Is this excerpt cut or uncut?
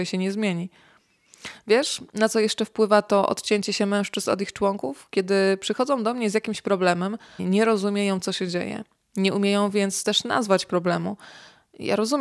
cut